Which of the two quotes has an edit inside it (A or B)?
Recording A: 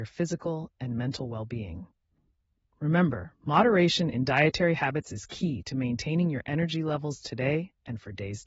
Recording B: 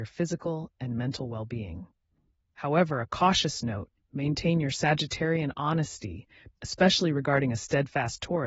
B